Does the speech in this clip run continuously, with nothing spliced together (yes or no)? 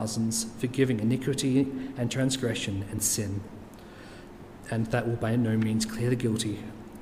yes